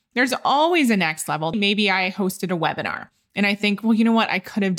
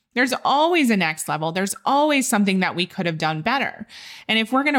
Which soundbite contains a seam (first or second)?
first